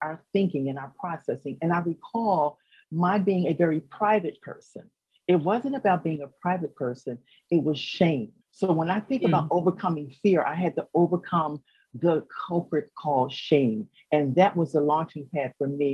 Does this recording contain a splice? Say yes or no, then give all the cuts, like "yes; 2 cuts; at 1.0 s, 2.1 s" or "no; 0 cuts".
yes; 1 cut; at 8.4 s